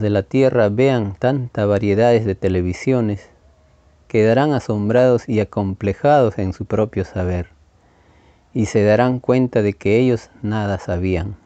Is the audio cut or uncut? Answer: uncut